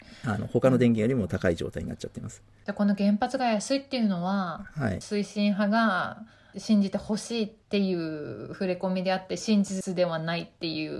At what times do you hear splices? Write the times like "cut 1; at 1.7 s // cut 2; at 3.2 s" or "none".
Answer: none